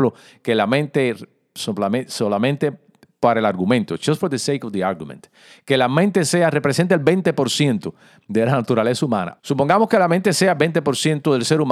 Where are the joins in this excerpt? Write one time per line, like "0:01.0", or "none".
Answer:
0:09.4

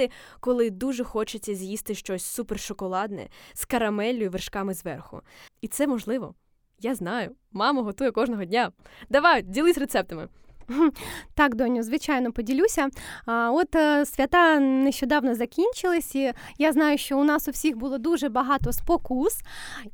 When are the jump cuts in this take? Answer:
0:05.5

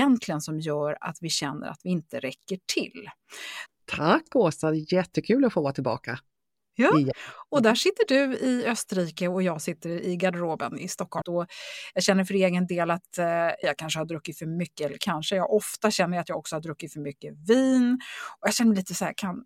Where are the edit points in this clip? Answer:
0:03.7
0:11.2
0:13.6

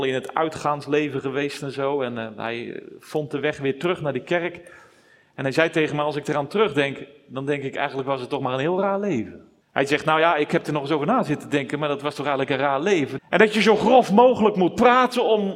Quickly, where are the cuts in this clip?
0:09.6
0:13.2

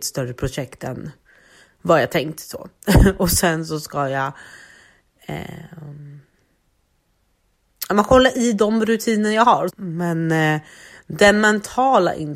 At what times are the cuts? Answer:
0:09.7

